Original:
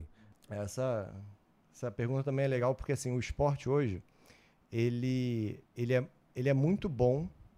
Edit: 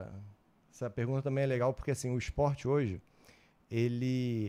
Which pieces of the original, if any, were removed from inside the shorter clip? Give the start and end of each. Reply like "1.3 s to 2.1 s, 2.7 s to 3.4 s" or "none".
none